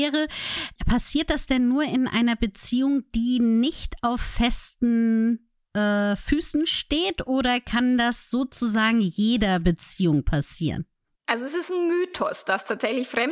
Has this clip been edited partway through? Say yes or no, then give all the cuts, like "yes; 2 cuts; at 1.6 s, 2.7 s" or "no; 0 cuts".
no; 0 cuts